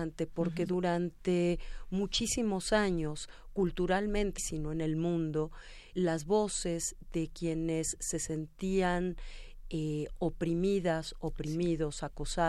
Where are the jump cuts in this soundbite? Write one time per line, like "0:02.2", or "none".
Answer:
0:04.4
0:05.9